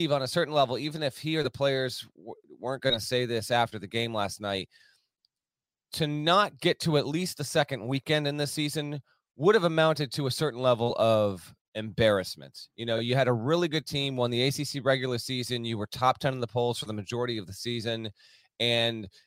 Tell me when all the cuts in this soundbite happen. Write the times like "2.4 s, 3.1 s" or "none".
none